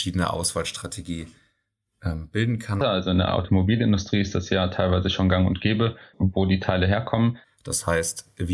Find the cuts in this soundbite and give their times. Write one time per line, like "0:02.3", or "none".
0:02.8
0:06.1
0:07.4

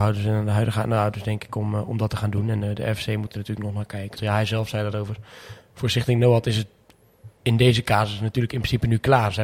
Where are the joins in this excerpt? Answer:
0:04.2

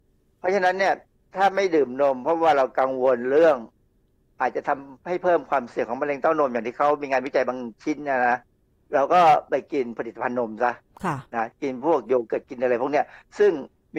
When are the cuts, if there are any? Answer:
none

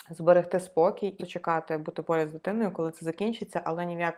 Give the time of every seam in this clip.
0:01.2

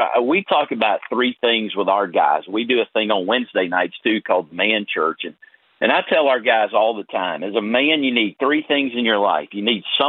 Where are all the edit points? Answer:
none

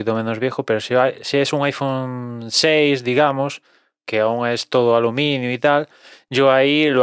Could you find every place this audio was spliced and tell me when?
none

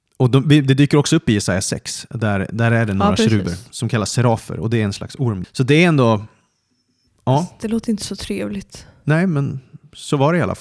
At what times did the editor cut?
0:05.4

